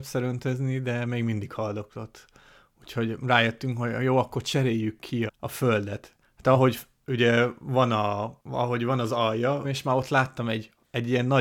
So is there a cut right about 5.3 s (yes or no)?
yes